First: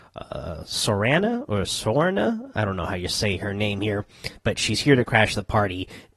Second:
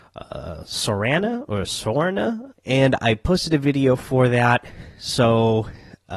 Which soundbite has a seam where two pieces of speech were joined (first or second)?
second